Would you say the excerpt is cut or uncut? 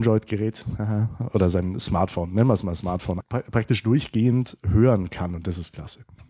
cut